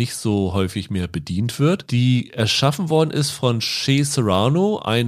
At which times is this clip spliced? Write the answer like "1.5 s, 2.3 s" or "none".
none